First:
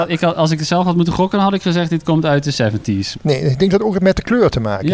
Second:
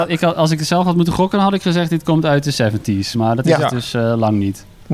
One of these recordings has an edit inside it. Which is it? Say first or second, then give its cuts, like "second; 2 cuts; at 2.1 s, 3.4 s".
first; 1 cut; at 3.1 s